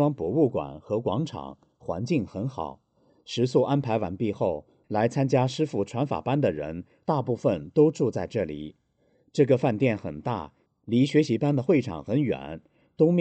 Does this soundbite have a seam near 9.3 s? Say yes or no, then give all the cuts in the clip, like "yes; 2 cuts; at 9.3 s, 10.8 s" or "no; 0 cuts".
no; 2 cuts; at 4.8 s, 10.7 s